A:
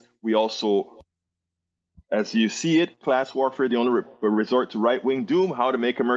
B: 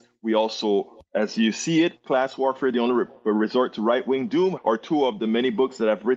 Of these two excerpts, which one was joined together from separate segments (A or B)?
B